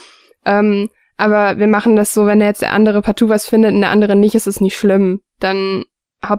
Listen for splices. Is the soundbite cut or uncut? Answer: uncut